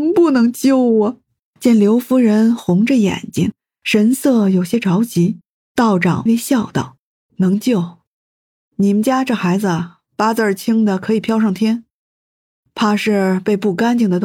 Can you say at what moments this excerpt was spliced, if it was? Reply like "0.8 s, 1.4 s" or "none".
6.3 s